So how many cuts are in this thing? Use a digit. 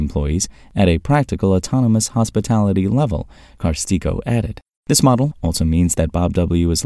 1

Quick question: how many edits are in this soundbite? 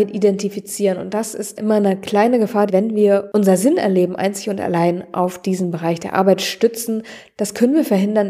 1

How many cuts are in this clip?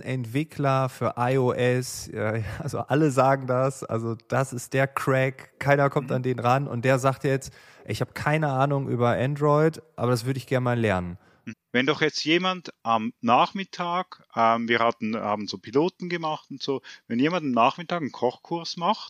1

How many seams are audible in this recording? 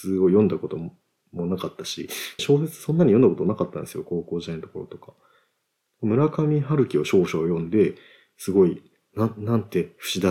1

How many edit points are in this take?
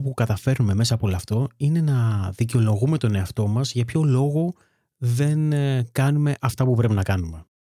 0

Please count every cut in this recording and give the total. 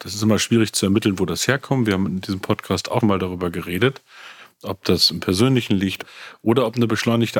1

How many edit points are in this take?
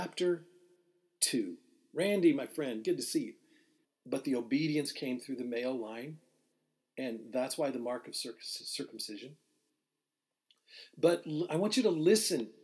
1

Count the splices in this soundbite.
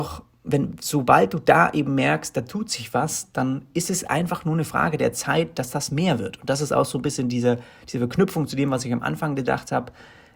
0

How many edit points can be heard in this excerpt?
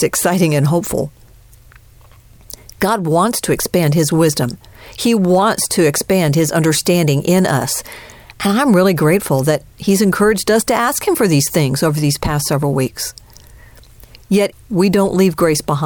1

